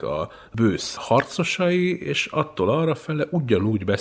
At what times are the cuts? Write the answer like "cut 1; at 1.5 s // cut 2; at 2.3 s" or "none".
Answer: none